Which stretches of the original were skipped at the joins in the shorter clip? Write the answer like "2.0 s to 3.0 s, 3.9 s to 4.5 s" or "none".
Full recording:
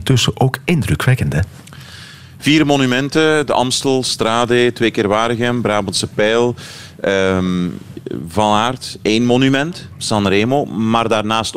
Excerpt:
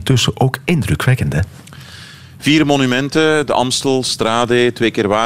none